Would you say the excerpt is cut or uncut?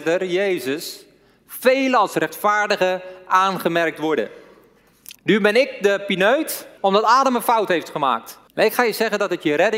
cut